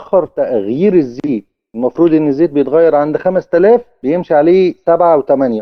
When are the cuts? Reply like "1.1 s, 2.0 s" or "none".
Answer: none